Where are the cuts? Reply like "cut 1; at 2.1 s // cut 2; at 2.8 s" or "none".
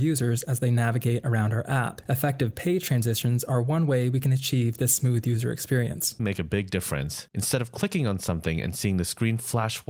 cut 1; at 6.2 s